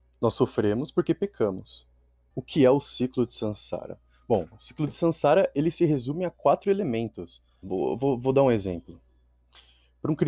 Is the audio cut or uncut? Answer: cut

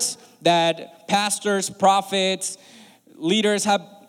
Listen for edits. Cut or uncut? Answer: uncut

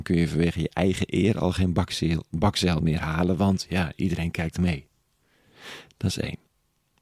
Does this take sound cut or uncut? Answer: uncut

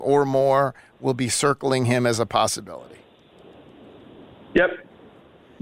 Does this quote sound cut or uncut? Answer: uncut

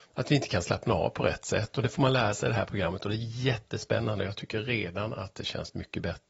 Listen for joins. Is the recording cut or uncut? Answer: uncut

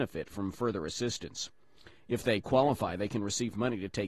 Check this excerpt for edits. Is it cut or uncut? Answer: uncut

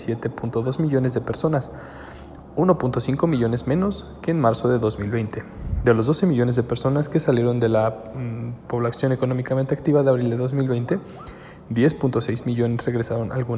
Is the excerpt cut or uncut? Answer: uncut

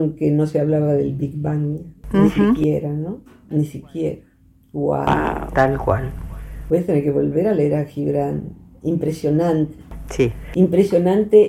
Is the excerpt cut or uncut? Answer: uncut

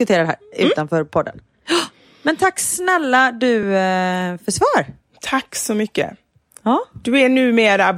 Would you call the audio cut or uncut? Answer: uncut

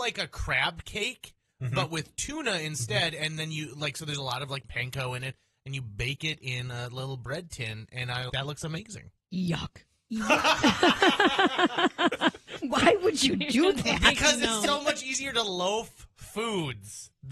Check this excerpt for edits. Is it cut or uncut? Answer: cut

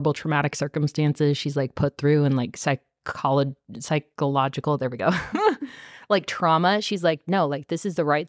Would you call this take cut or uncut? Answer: uncut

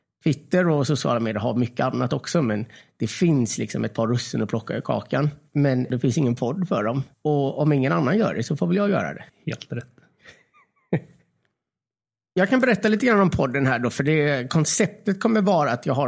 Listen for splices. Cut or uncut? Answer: uncut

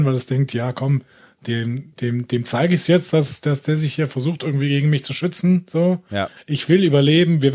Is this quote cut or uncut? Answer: uncut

